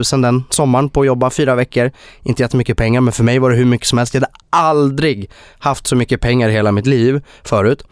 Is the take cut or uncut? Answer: uncut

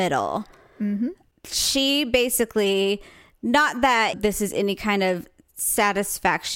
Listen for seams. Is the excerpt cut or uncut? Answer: cut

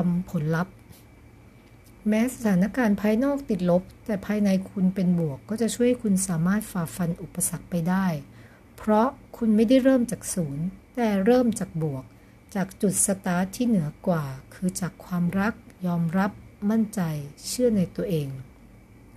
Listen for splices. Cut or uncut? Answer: uncut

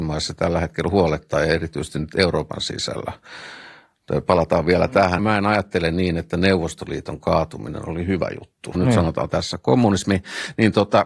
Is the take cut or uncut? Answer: cut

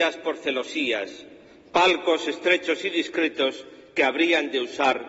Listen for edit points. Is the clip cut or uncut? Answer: uncut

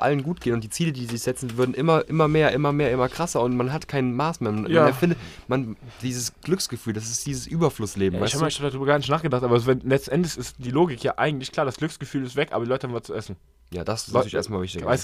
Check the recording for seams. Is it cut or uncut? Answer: uncut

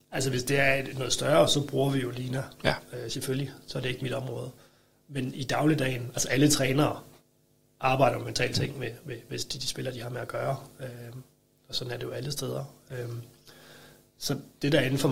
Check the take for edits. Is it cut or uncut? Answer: uncut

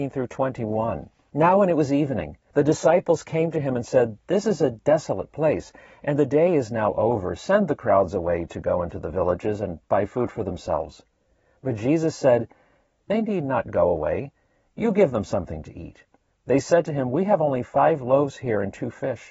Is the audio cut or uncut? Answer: uncut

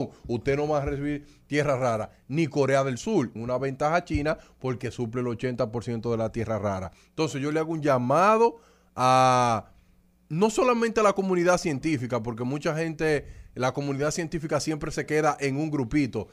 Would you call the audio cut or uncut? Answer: cut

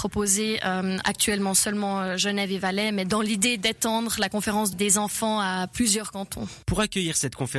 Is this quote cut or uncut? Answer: cut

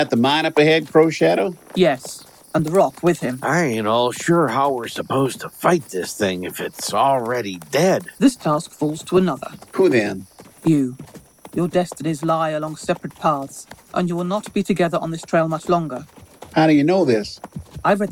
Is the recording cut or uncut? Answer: cut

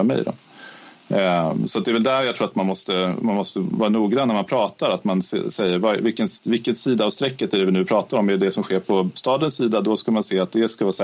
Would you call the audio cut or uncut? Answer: uncut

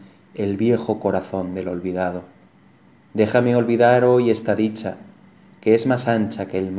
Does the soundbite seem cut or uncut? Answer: uncut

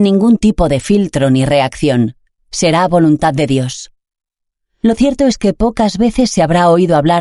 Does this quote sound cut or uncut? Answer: uncut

